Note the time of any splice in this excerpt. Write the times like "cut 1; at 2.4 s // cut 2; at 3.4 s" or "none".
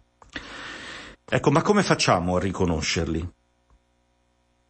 cut 1; at 1.1 s